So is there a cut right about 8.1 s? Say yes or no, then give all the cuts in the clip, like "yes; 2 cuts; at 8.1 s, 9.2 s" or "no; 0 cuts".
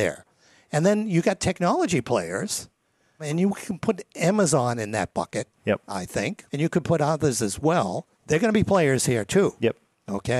yes; 2 cuts; at 6.5 s, 8.1 s